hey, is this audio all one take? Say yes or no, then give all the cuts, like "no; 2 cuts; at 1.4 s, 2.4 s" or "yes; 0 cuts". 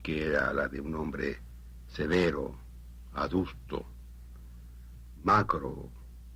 no; 1 cut; at 5.2 s